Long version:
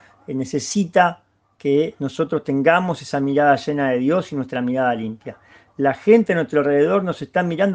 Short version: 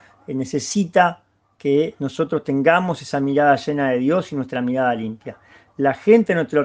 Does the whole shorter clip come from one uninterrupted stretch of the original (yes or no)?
yes